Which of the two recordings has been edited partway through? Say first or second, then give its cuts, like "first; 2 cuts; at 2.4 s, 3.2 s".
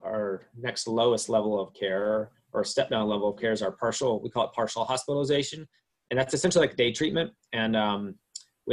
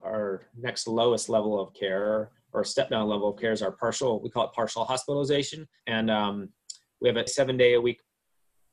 second; 2 cuts; at 5.8 s, 7.3 s